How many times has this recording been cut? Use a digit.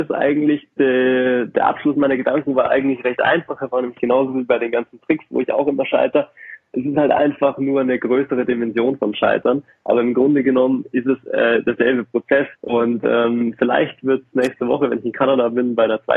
1